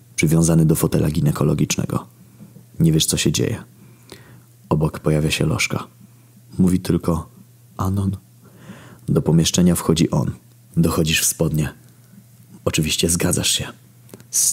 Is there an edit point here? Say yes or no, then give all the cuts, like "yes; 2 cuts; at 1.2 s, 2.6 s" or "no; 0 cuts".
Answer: yes; 3 cuts; at 7.8 s, 10.7 s, 12.6 s